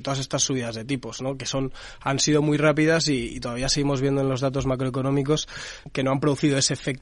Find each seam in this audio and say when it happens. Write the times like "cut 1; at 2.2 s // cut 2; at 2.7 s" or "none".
cut 1; at 5.8 s

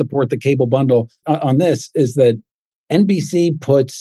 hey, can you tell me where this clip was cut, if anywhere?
cut 1; at 1.2 s

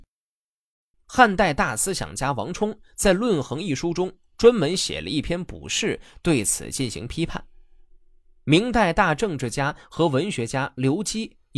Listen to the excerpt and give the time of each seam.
cut 1; at 0.9 s

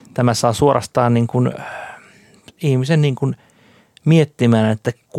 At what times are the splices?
cut 1; at 2.6 s

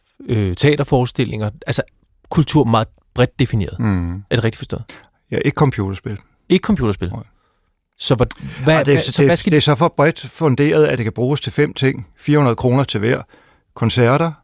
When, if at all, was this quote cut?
none

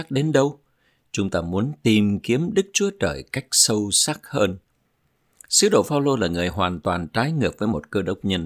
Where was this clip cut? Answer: none

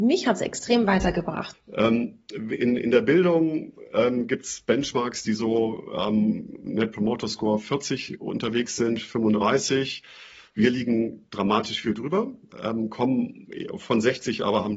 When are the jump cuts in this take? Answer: cut 1; at 1.5 s

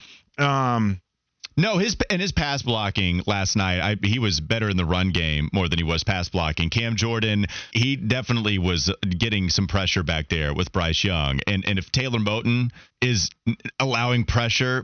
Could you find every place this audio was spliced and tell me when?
cut 1; at 7.7 s // cut 2; at 12.9 s

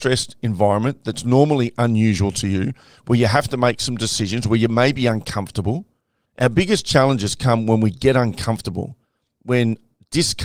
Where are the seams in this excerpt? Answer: cut 1; at 6.2 s

